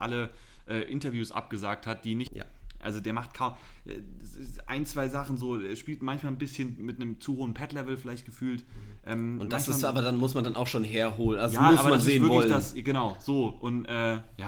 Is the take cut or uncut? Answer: cut